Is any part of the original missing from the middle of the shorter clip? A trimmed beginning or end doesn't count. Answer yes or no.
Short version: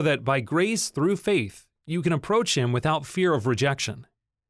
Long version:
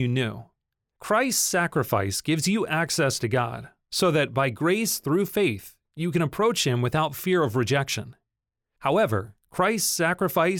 no